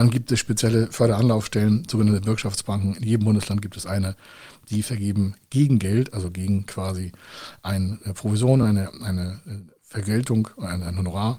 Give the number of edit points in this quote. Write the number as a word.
zero